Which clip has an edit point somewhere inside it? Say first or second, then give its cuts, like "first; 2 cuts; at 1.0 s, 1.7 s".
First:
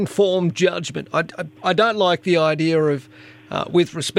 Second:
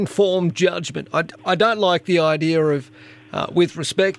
second; 1 cut; at 1.3 s